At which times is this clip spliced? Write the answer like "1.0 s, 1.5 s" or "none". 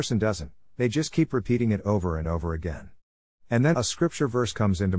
3.7 s